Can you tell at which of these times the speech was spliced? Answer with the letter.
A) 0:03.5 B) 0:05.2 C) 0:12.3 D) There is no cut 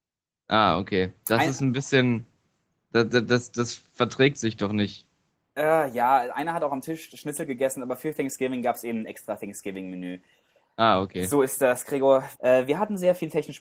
C